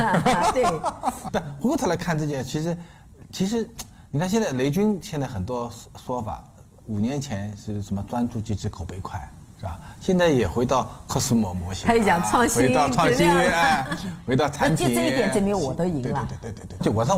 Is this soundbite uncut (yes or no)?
yes